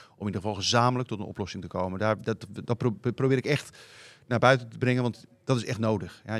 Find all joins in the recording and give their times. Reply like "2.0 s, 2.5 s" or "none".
none